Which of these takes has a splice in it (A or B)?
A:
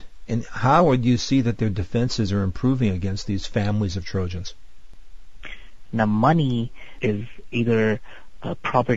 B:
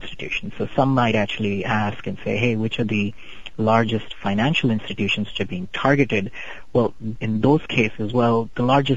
A